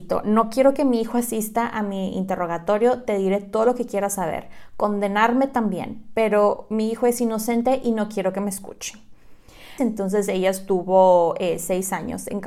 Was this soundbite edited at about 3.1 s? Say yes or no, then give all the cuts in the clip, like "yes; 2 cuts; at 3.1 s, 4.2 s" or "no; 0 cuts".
no; 1 cut; at 9.8 s